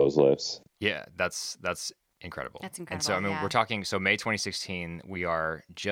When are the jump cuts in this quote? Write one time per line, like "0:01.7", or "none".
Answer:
none